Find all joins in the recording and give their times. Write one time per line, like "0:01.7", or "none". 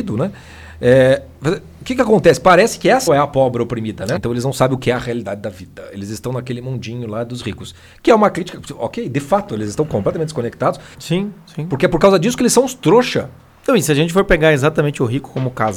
0:03.1
0:04.2
0:10.9